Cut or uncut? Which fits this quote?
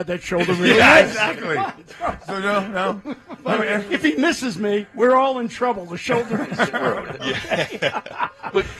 cut